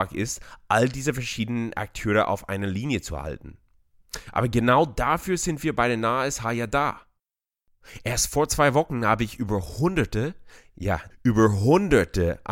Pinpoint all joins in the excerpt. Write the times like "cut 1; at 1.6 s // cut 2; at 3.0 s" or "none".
cut 1; at 11.1 s